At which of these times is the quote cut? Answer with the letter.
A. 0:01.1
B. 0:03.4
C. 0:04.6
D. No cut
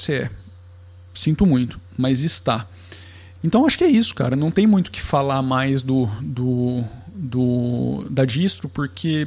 B